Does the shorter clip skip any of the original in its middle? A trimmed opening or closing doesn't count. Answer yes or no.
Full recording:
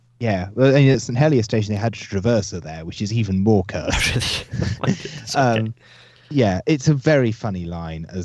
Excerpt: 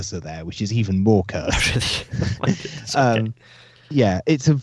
no